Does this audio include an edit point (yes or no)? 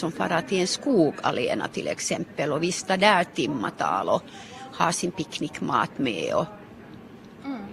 no